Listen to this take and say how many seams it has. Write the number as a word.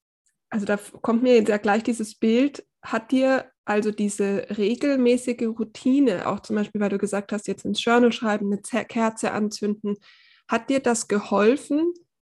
three